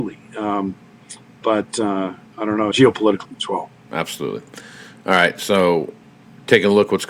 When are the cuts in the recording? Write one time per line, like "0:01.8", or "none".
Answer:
0:02.7